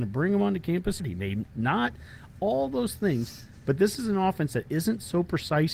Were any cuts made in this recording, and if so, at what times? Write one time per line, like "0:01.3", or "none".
0:01.0

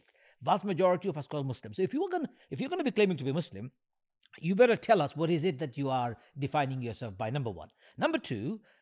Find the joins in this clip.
none

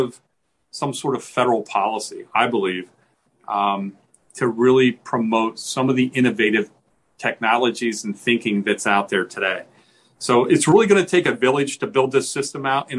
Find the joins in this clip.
none

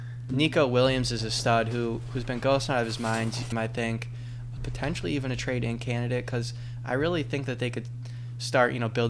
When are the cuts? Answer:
0:03.5
0:04.6

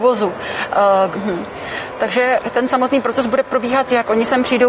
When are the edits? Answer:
0:01.1

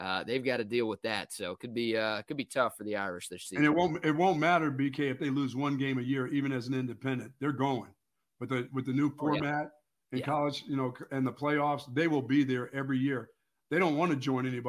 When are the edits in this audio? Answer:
none

